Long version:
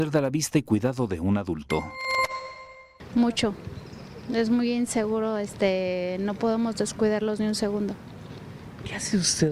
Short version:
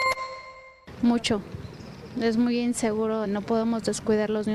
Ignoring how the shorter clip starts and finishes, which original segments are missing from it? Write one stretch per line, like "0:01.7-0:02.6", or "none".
0:05.4-0:06.2